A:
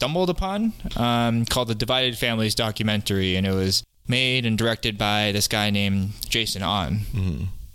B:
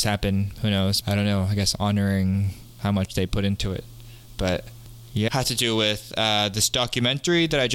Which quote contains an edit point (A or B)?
B